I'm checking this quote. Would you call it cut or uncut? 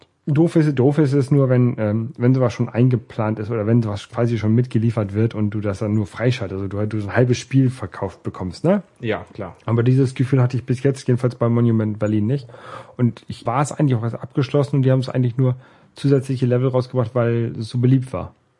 cut